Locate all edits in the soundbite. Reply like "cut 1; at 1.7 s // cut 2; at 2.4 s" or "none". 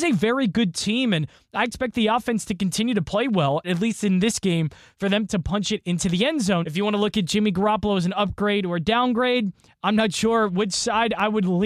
cut 1; at 3.6 s // cut 2; at 6.6 s